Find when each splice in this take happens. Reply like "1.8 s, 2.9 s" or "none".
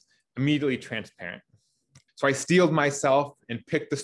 2.1 s